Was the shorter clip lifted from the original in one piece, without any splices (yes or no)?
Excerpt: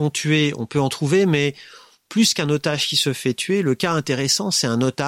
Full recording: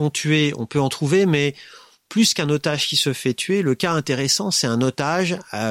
yes